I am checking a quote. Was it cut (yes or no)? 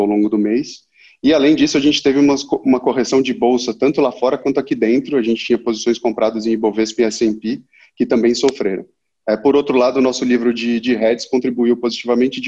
no